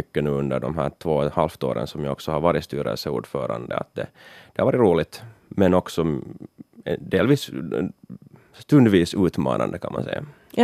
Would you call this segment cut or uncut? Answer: uncut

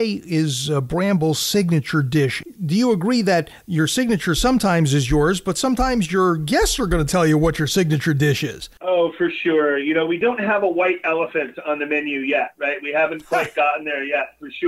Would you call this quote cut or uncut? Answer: uncut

